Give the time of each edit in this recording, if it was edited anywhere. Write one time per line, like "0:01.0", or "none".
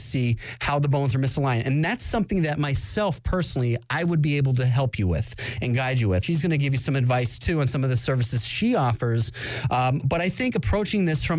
0:06.2